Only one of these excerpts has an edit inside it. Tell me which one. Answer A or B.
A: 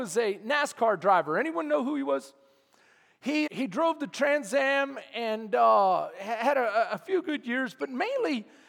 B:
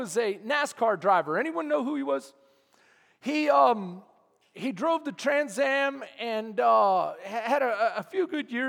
A